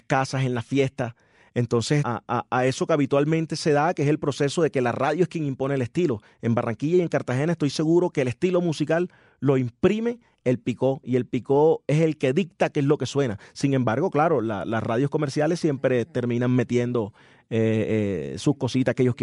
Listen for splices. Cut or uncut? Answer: cut